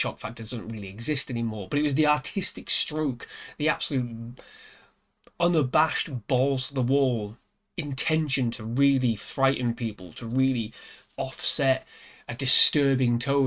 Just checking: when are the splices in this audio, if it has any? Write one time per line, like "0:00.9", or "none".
none

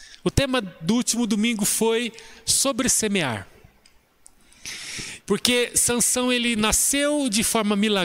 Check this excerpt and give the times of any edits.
0:05.2

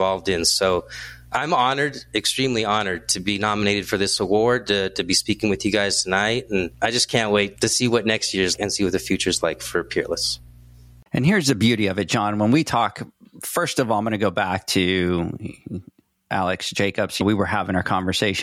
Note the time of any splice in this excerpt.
none

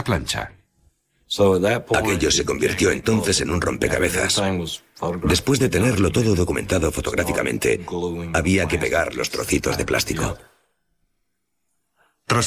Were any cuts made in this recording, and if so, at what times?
none

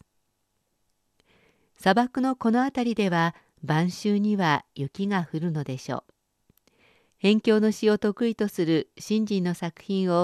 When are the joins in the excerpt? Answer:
0:07.1

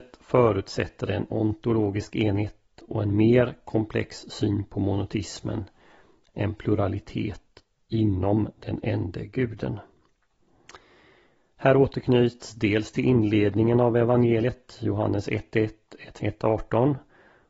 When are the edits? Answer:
0:16.2

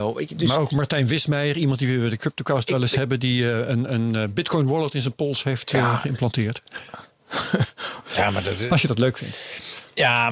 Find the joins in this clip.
none

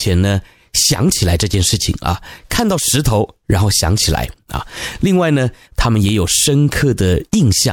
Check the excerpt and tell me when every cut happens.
0:05.6

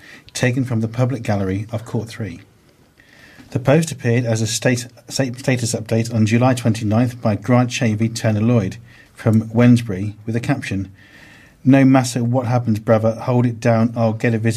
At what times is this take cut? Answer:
none

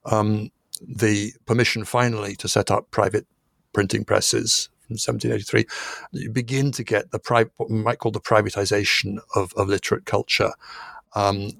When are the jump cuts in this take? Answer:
0:06.1

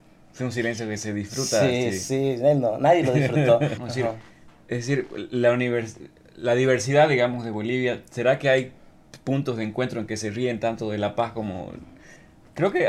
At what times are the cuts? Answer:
0:03.8

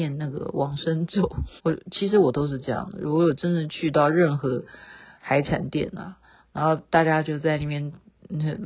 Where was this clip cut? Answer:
0:01.6

